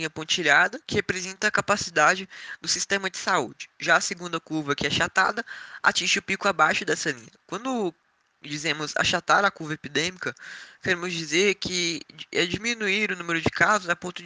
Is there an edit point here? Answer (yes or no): no